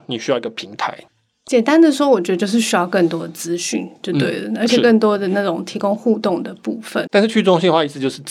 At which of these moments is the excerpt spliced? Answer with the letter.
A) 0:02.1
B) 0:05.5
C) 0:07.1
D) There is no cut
C